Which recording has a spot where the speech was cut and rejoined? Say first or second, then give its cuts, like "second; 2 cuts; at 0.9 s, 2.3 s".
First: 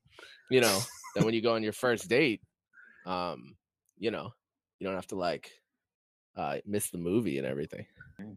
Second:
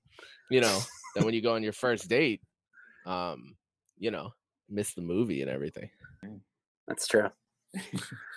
second; 1 cut; at 4.7 s